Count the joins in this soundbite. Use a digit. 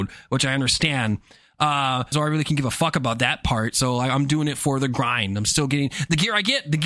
1